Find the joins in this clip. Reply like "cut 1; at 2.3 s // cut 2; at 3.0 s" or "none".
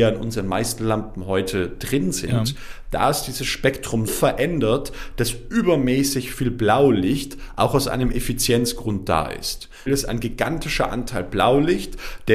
cut 1; at 4.1 s // cut 2; at 9.9 s